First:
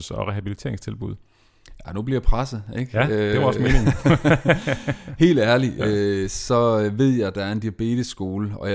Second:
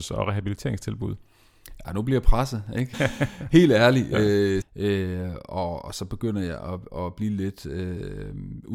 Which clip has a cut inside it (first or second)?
second